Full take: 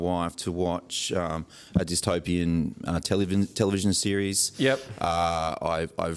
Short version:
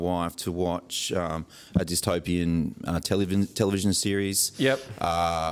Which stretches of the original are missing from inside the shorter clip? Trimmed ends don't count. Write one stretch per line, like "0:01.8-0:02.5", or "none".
none